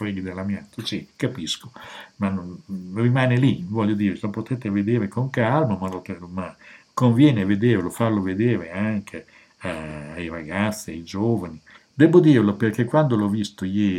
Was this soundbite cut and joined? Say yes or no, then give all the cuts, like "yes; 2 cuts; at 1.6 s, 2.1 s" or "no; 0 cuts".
yes; 1 cut; at 11.8 s